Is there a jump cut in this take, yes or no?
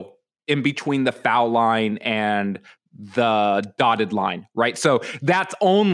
no